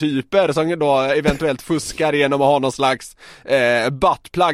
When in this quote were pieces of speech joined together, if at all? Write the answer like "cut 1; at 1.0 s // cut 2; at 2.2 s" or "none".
none